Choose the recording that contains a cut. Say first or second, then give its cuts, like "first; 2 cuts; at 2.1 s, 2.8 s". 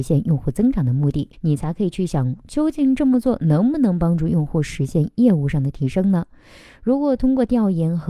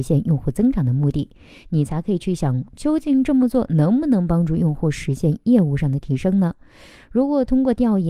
first; 1 cut; at 1.3 s